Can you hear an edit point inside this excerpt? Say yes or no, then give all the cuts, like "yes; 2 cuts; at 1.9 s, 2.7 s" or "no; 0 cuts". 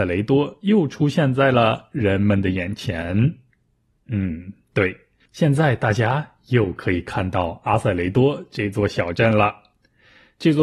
no; 0 cuts